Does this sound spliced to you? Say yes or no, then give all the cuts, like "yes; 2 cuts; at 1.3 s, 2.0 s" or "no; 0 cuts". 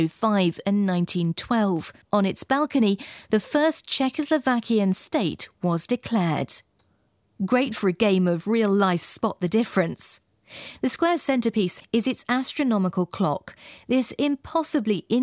yes; 3 cuts; at 2.0 s, 7.4 s, 11.8 s